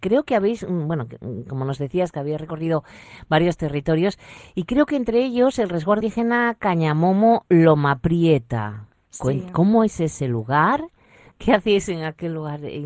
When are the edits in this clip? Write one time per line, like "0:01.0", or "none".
0:06.0